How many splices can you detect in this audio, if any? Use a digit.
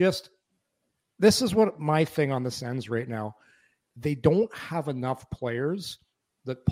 0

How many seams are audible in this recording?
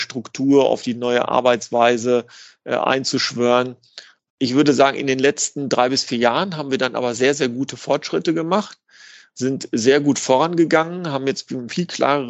1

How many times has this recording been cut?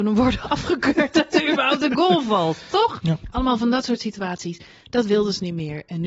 1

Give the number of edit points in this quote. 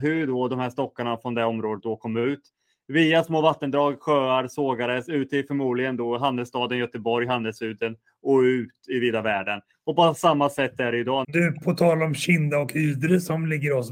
1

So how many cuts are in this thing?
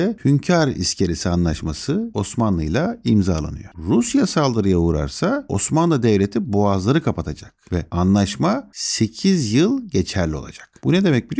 1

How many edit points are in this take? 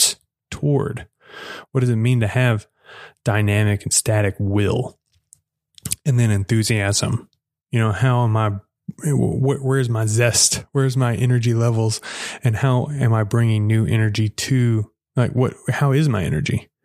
0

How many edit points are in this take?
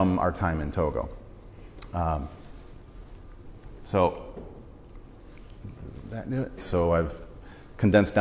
1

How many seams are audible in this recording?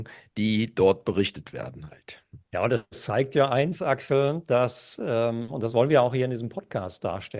1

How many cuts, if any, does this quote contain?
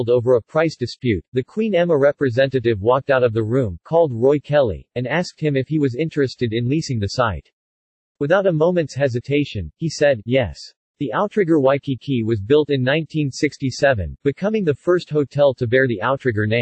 0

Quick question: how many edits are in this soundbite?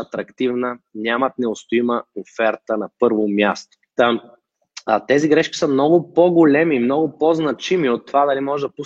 1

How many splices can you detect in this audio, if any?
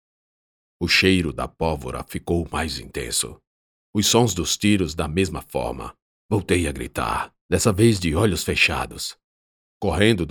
2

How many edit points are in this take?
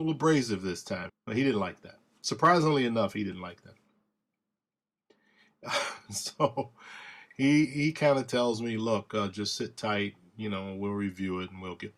1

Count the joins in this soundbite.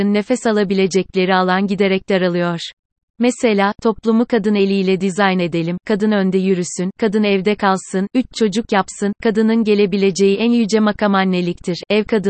2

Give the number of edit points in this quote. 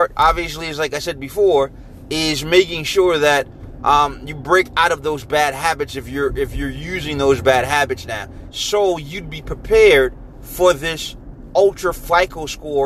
1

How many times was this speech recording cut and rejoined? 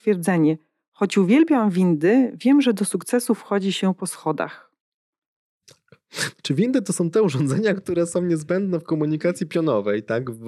0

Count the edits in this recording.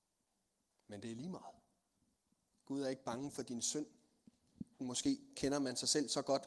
1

